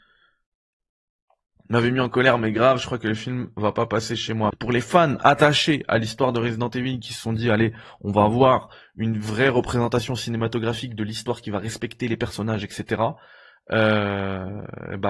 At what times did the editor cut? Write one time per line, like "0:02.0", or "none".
0:04.5

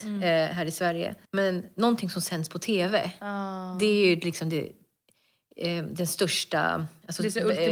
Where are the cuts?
0:01.2

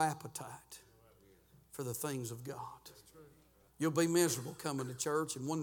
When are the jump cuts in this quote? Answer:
0:03.7

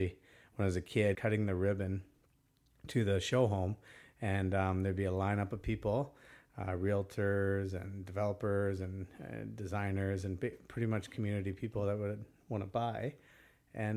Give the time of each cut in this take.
0:01.1

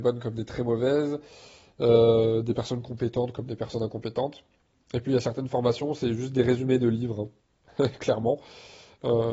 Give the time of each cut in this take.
none

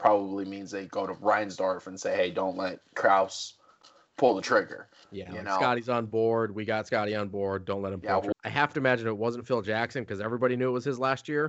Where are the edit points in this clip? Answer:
0:08.3

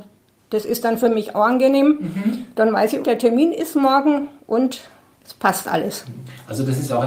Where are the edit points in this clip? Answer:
0:03.0

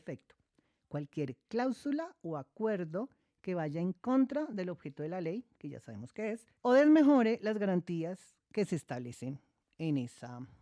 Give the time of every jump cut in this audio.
0:06.6

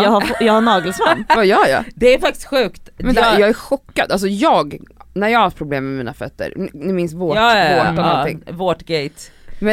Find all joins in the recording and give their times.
none

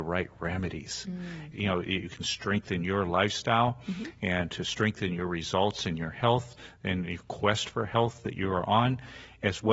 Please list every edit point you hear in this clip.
0:01.5

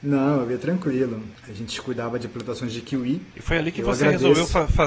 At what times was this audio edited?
0:01.4
0:03.3

